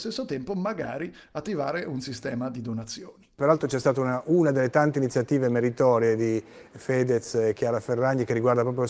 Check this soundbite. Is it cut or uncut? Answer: uncut